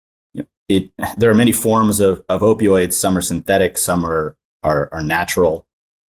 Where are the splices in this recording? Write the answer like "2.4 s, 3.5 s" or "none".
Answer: none